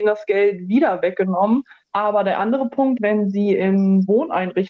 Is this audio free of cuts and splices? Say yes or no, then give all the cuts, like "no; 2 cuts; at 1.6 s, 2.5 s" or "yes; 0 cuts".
no; 2 cuts; at 1.8 s, 3.0 s